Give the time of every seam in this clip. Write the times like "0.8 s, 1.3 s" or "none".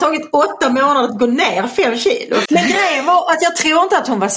2.5 s

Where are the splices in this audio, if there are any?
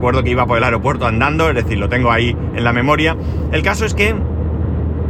none

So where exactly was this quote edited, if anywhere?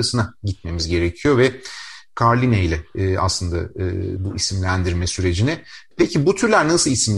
4.2 s, 5.9 s

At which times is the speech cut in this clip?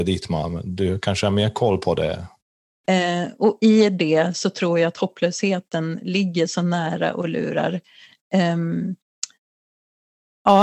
2.8 s

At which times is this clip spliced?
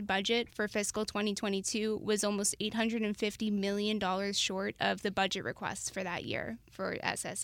none

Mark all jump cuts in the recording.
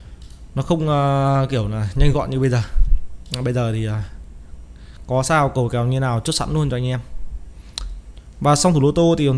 none

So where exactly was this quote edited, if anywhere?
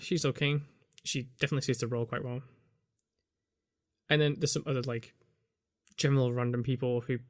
none

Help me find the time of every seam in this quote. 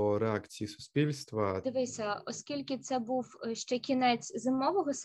1.6 s

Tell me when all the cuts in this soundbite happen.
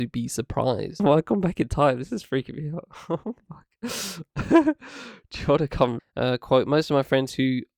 1.0 s, 6.0 s

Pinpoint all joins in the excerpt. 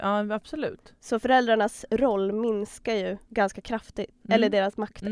3.2 s

